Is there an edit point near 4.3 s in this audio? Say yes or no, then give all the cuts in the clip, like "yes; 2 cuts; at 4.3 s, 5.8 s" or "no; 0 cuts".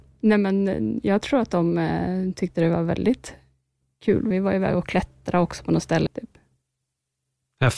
yes; 2 cuts; at 4.3 s, 6.1 s